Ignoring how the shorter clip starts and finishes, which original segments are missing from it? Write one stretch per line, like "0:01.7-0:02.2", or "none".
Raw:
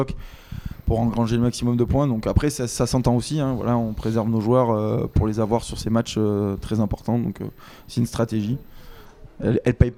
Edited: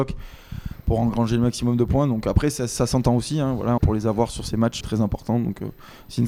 0:03.8-0:05.1
0:06.1-0:06.6